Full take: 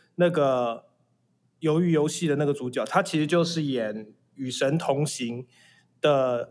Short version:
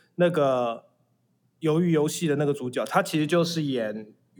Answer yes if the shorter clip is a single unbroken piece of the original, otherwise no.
yes